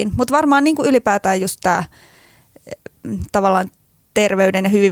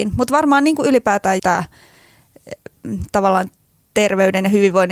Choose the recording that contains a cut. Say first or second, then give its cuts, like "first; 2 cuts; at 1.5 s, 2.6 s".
second; 1 cut; at 1.4 s